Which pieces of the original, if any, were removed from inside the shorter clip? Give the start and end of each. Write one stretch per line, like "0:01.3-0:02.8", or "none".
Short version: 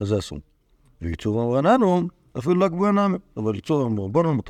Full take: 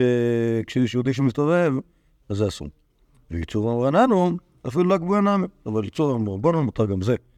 none